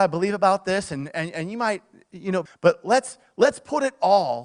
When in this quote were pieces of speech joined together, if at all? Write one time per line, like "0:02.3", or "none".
0:02.5